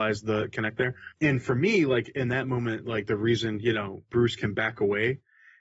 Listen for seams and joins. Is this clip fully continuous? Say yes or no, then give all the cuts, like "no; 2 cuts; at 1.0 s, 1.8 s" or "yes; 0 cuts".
no; 1 cut; at 1.1 s